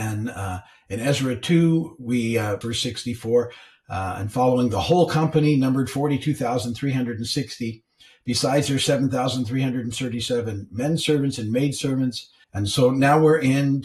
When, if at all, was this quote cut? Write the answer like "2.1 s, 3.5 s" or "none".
2.6 s, 12.4 s